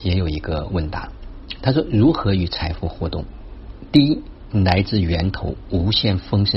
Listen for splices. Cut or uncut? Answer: uncut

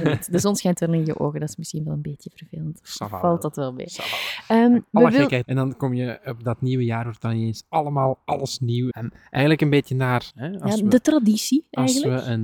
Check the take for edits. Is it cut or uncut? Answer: cut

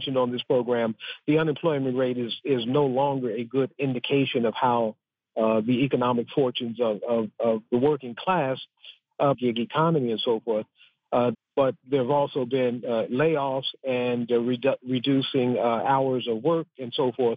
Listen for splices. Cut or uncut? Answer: cut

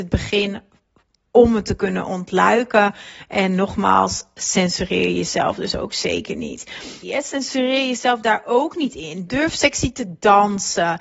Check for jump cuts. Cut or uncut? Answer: cut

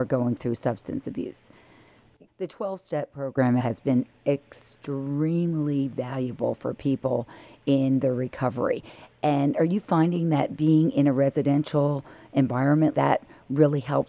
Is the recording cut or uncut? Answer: cut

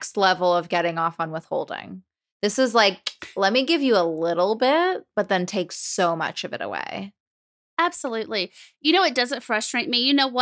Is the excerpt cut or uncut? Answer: uncut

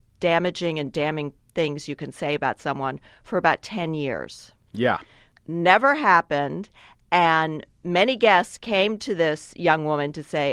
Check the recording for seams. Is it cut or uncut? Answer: cut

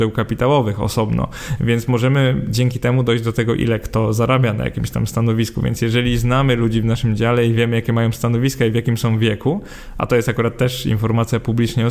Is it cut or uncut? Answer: uncut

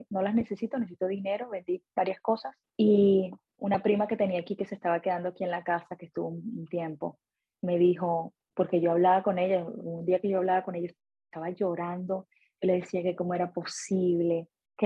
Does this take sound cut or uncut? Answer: uncut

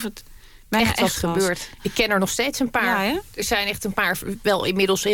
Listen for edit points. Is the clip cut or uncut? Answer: cut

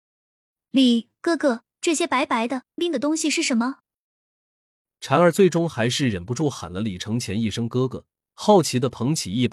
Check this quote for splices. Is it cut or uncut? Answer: cut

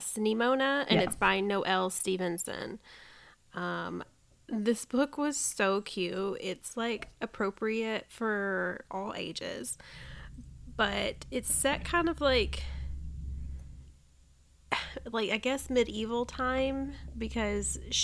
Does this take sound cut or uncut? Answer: uncut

